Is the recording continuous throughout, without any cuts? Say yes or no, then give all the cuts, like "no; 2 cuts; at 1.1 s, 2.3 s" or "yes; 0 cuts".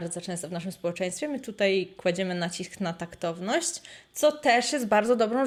yes; 0 cuts